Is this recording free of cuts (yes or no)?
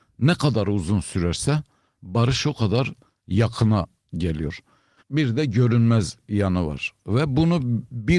no